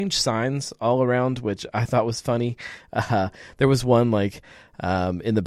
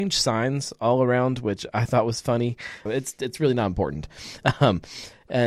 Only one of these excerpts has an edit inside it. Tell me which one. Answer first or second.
second